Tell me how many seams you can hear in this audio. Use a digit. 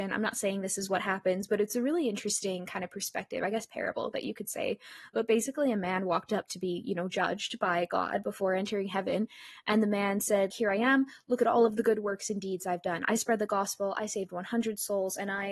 1